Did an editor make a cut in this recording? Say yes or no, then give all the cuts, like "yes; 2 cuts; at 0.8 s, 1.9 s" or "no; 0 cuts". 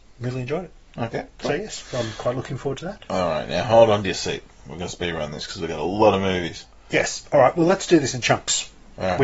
no; 0 cuts